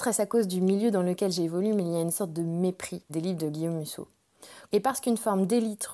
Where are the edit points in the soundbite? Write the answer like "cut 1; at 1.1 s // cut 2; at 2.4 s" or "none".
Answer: cut 1; at 3.1 s // cut 2; at 4.6 s